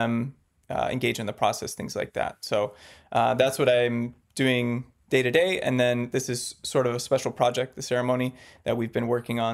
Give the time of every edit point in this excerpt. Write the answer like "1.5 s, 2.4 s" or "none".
none